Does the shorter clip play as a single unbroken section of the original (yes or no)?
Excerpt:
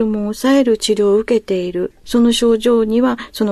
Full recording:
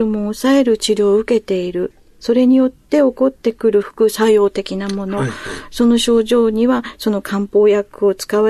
no